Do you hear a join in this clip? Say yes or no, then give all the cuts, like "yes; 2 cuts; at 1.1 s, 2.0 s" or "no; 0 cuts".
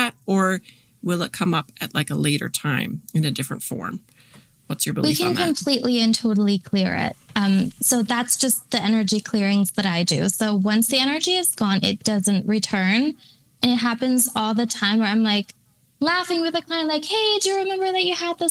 no; 0 cuts